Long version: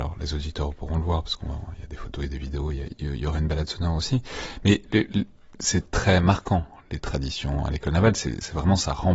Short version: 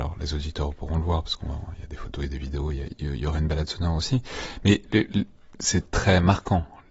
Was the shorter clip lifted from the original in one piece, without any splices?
yes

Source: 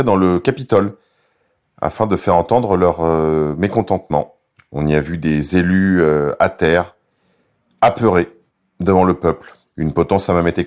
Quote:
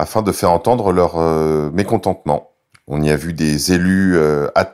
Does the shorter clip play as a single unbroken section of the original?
yes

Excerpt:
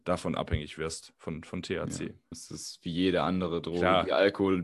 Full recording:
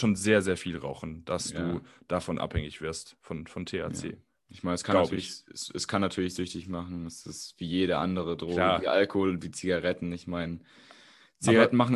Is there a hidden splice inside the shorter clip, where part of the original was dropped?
yes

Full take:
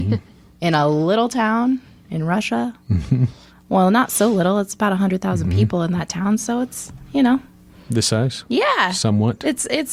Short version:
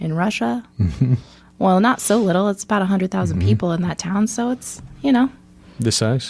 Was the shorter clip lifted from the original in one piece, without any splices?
yes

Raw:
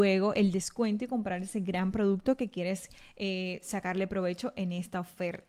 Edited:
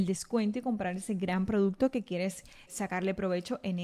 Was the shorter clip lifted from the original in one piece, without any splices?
no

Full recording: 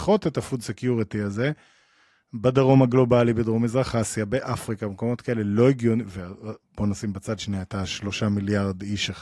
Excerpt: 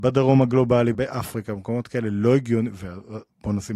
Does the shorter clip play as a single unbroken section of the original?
no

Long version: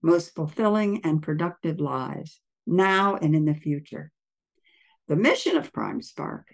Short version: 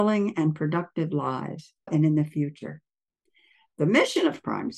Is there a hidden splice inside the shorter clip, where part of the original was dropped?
yes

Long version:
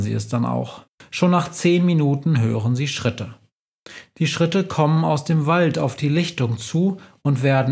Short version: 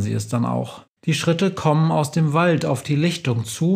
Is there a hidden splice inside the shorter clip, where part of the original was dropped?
yes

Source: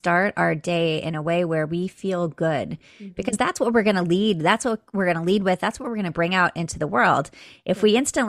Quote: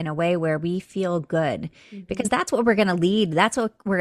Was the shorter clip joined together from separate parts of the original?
no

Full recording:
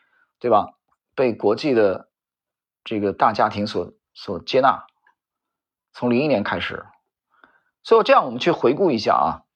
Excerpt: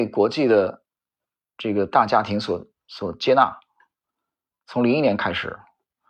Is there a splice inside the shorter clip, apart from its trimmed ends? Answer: no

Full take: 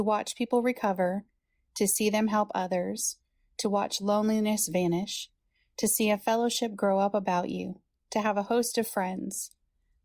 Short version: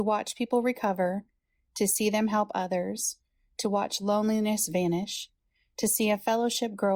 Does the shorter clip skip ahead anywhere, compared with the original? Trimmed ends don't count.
no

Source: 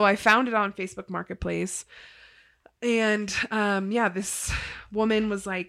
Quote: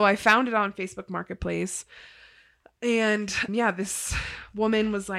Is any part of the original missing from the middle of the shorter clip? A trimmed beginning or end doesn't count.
yes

